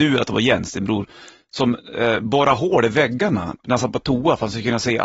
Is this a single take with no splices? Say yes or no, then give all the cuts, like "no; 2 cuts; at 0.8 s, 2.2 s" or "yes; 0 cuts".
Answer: yes; 0 cuts